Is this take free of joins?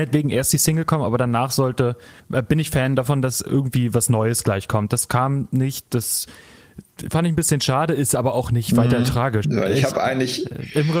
no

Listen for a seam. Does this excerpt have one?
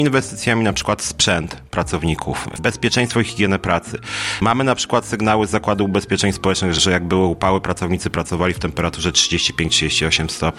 no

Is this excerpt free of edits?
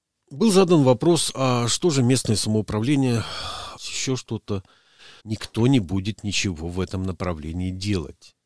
no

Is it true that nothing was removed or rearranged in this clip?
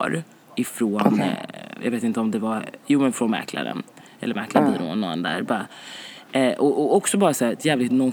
yes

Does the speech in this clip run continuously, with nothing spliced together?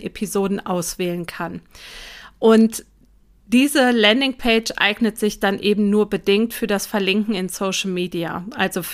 yes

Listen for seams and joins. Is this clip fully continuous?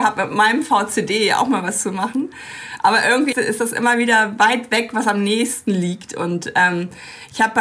no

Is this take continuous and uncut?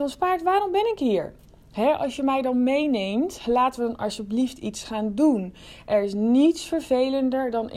yes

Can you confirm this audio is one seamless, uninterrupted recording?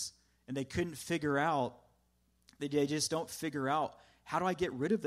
yes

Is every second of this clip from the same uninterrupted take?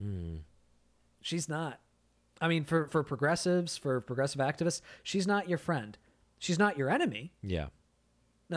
no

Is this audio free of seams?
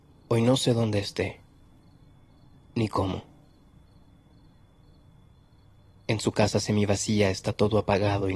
yes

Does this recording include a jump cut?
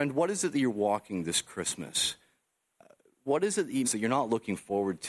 yes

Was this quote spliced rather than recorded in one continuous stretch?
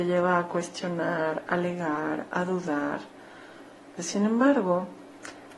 yes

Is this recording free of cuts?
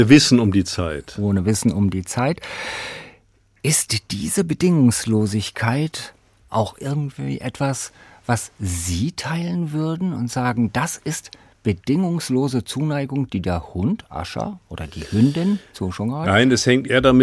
yes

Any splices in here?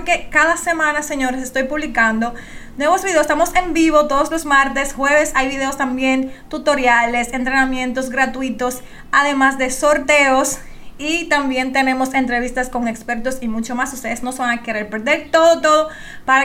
no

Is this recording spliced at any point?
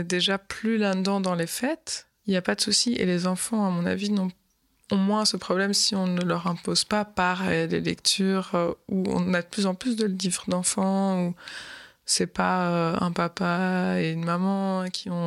no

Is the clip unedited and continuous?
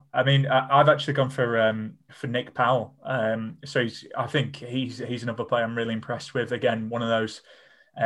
yes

